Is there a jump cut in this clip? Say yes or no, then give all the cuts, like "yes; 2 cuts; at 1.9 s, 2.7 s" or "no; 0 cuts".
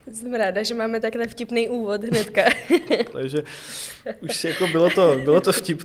yes; 1 cut; at 3.1 s